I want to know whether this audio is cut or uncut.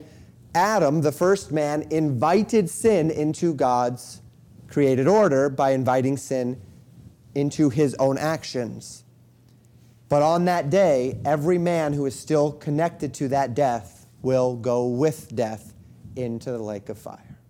cut